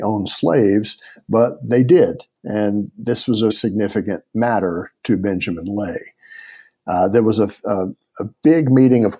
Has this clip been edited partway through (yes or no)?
yes